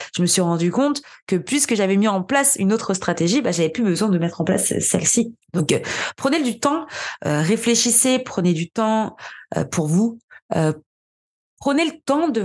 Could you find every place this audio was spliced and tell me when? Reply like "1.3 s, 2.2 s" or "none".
5.4 s